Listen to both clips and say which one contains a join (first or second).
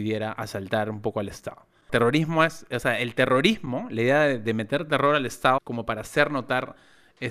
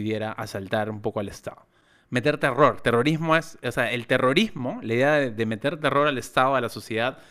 first